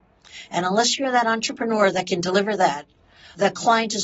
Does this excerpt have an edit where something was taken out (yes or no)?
no